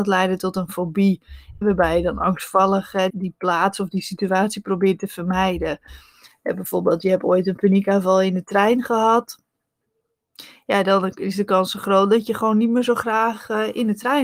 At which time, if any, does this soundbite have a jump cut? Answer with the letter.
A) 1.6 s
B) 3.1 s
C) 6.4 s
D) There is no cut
B